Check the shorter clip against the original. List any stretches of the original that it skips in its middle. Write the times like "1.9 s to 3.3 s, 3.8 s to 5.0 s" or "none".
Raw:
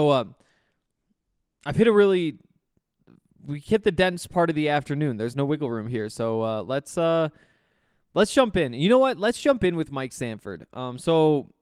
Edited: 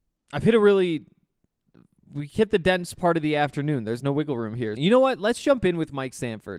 6.1 s to 8.8 s